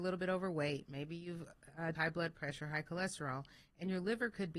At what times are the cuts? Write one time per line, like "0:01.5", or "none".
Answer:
0:01.9